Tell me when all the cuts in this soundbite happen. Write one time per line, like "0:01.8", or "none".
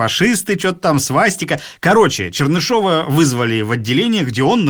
none

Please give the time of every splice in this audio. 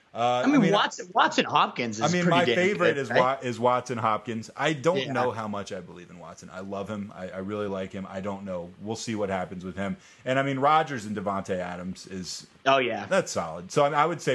none

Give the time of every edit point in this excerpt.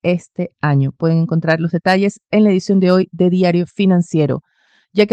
none

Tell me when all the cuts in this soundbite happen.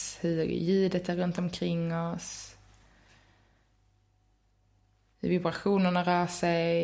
none

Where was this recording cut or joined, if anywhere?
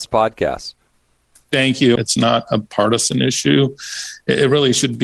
0:02.0

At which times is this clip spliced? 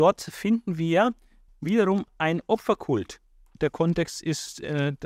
0:01.5
0:03.5

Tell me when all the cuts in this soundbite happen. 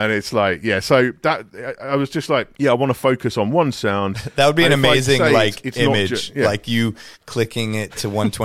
0:02.5

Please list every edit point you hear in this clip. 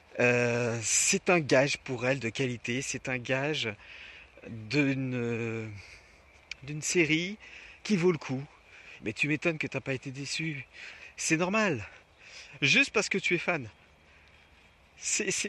0:09.0
0:12.6

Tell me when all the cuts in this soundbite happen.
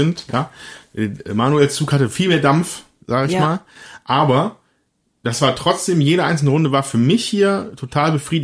none

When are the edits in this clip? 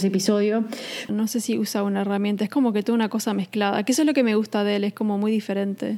0:01.1

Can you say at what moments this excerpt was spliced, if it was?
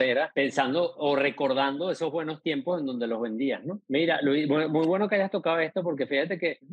none

